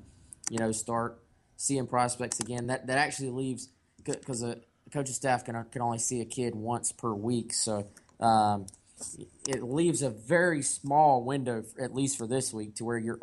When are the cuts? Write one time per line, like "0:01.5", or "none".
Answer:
none